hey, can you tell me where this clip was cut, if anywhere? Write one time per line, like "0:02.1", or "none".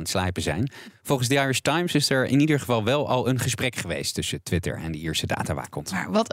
none